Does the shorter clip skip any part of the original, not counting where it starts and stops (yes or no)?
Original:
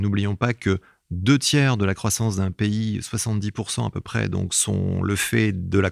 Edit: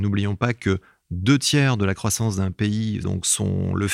yes